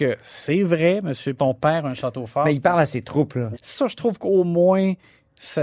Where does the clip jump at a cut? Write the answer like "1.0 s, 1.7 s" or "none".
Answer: 1.4 s, 3.5 s